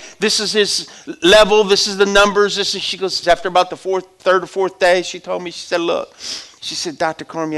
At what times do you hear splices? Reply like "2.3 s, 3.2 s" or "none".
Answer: 3.2 s